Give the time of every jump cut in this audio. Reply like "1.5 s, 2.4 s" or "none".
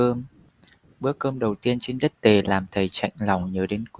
none